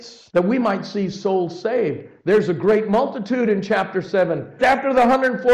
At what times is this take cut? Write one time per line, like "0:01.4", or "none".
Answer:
0:04.6